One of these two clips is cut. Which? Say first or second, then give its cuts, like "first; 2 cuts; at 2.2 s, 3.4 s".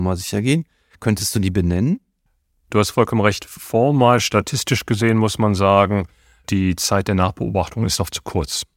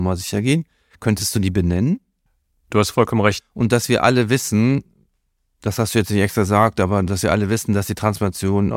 second; 1 cut; at 3.4 s